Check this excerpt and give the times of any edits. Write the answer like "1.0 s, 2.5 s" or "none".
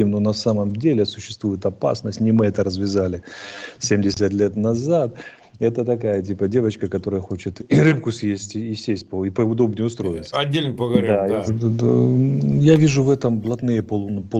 7.6 s, 10.3 s, 11.5 s